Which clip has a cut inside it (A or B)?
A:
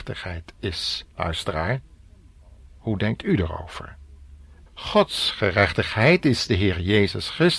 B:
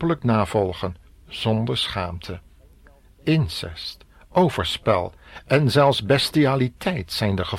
A